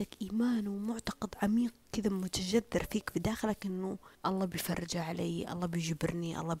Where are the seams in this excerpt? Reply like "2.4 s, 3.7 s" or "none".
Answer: 4.1 s